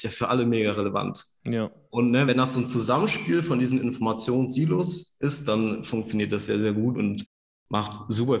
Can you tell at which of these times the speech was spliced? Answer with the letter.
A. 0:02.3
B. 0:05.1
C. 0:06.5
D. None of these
A